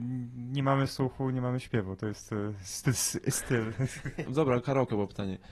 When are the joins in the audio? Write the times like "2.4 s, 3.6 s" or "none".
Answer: 4.3 s